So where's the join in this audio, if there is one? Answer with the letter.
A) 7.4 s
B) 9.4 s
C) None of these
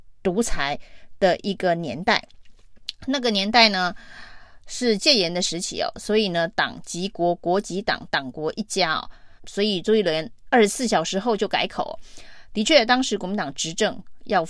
B